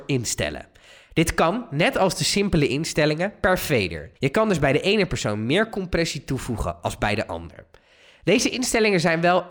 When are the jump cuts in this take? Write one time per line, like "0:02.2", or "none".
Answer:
0:04.2